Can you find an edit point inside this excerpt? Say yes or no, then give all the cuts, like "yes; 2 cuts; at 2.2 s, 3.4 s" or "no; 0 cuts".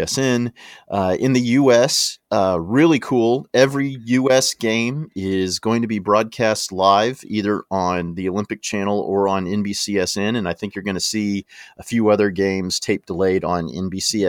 no; 0 cuts